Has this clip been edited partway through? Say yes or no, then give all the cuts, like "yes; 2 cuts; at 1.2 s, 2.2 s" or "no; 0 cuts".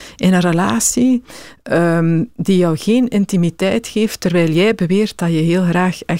no; 0 cuts